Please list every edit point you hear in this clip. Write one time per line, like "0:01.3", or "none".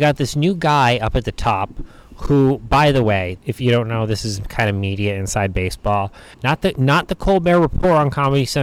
0:03.4
0:06.3